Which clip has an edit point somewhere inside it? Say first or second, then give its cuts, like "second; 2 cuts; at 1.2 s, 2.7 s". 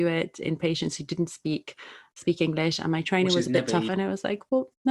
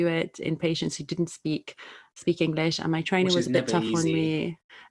first; 1 cut; at 3.9 s